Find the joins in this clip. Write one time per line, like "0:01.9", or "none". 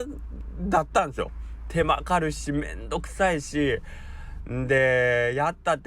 0:02.0